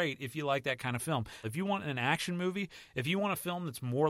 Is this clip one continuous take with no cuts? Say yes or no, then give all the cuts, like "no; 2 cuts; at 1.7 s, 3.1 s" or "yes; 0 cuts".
no; 1 cut; at 1.4 s